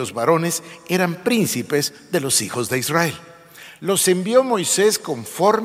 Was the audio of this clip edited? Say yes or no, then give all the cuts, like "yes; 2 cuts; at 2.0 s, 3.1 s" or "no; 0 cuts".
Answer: no; 0 cuts